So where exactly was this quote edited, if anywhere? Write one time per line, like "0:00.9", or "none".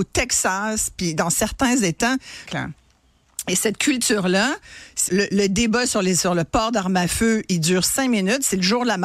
0:02.5
0:05.1